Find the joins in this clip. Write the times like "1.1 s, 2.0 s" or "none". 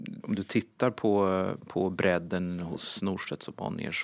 none